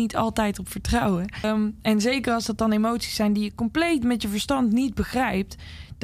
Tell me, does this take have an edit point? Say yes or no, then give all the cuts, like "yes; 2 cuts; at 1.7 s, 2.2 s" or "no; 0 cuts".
yes; 1 cut; at 1.4 s